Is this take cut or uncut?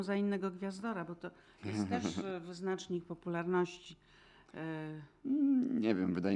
uncut